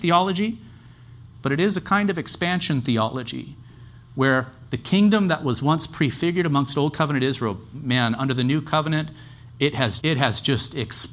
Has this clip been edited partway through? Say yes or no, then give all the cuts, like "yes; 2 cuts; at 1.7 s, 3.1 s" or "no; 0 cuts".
yes; 2 cuts; at 1.3 s, 10.0 s